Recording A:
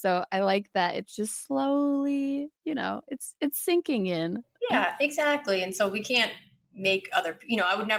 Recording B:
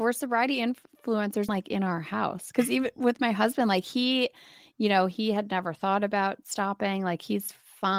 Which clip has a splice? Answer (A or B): B